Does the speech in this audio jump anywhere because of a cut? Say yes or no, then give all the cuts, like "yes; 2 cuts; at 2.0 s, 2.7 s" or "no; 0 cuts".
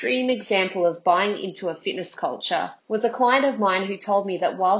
yes; 1 cut; at 2.8 s